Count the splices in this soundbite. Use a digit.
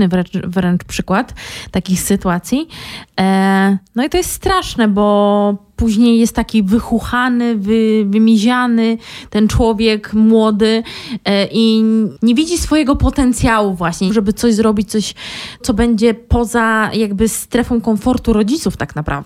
2